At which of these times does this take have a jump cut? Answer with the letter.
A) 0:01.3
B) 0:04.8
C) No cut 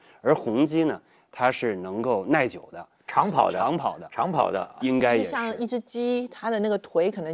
B